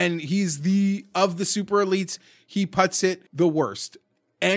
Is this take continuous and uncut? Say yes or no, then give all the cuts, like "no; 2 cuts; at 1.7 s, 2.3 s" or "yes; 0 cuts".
no; 1 cut; at 3.3 s